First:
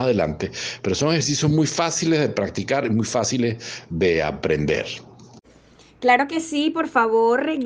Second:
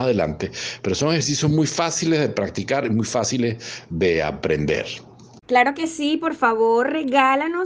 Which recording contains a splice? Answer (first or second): second